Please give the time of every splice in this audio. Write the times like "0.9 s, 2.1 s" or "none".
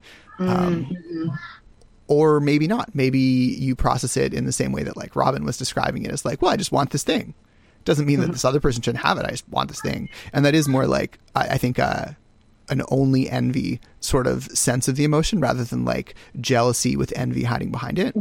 none